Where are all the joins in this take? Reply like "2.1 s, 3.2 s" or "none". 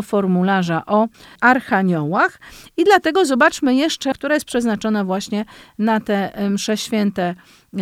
4.1 s

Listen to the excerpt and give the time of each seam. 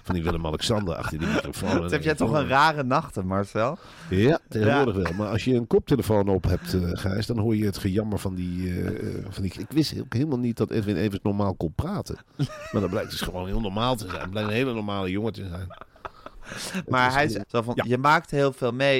9.6 s, 17.4 s

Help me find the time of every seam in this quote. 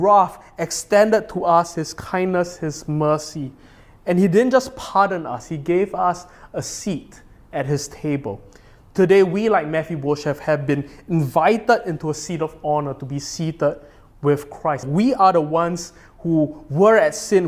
14.8 s

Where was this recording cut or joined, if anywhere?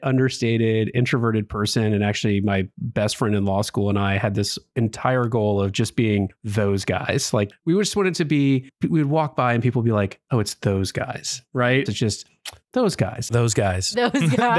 11.9 s, 13.3 s

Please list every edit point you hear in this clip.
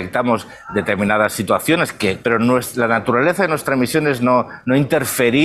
2.2 s

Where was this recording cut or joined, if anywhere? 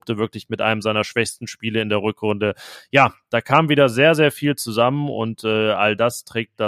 none

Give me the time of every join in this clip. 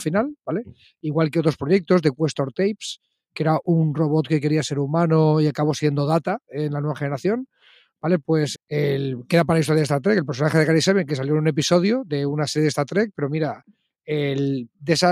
8.5 s

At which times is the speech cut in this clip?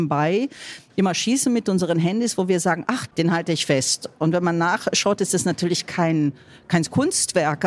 3.1 s

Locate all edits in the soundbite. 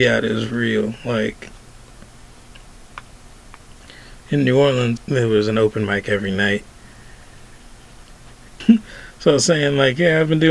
5.0 s, 8.6 s

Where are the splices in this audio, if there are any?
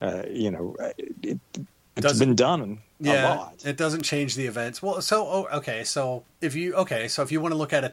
6.3 s

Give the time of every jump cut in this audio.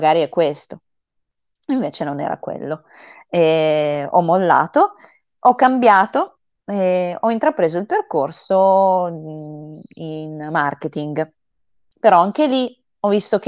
none

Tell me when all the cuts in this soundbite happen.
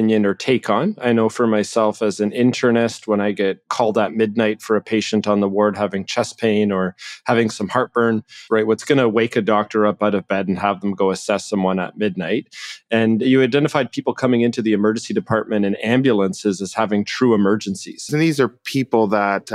8.5 s, 18.1 s

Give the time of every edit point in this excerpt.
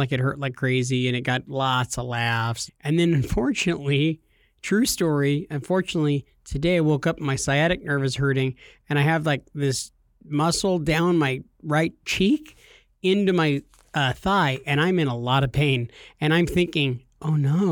2.7 s

